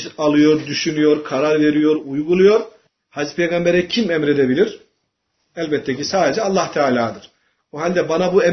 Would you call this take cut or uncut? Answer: cut